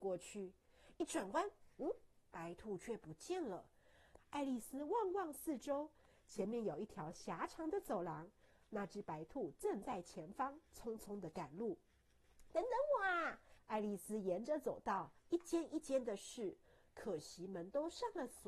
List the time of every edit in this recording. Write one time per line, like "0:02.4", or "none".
0:00.9
0:04.2
0:13.6